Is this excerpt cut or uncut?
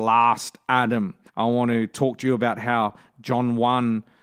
cut